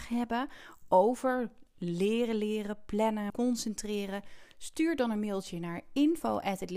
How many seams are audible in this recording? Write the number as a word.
one